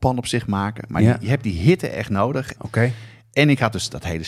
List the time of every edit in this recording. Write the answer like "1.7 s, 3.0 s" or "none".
2.5 s